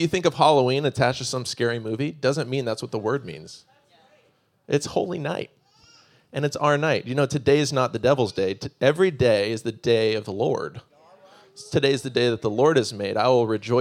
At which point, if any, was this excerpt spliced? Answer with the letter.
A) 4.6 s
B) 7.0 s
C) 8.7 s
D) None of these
D